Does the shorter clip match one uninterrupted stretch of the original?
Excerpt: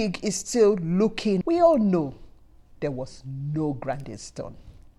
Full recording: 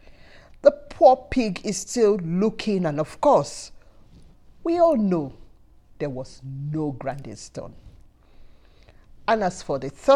no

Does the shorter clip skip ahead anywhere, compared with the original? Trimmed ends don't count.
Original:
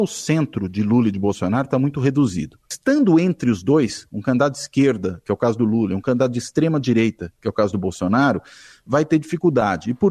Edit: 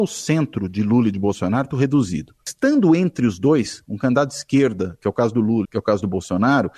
yes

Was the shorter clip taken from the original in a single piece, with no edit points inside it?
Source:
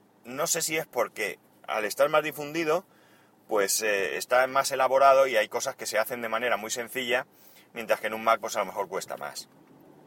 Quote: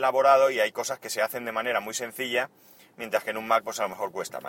yes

